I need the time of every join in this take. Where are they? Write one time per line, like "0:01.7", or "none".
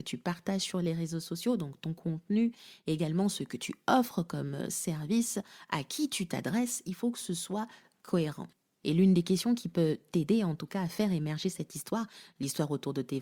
0:08.7